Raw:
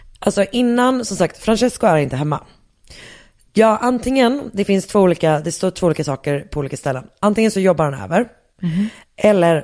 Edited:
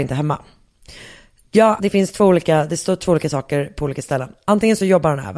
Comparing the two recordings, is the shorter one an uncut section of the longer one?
no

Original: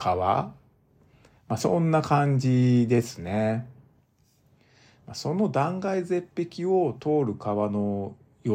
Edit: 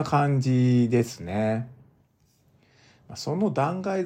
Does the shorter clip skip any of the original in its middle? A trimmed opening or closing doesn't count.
no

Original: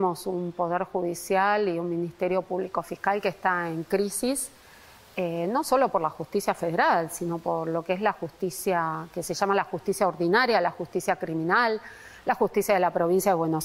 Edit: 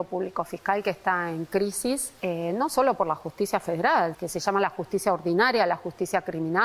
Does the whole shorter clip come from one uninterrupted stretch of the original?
no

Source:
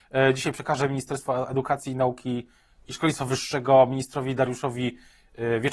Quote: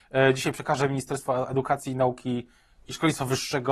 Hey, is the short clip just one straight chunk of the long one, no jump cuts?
yes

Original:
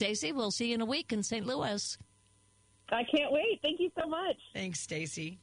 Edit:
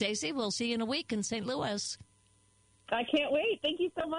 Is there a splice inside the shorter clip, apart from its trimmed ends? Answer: no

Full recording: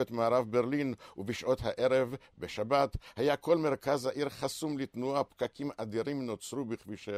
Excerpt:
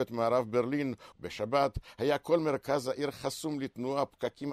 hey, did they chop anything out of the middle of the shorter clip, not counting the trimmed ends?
yes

